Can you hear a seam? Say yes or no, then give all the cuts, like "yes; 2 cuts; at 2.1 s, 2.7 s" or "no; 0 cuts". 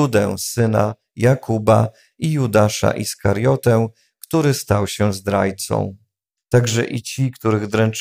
yes; 1 cut; at 6.4 s